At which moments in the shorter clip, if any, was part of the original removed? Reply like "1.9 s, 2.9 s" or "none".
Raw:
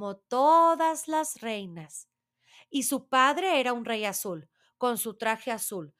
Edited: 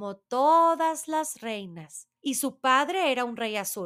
2.2 s